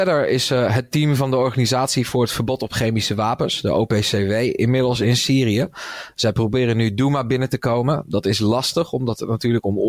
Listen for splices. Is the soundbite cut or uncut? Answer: uncut